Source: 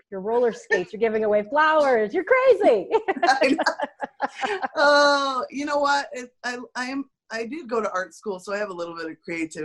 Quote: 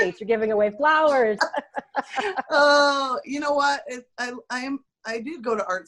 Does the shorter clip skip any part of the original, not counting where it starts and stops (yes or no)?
yes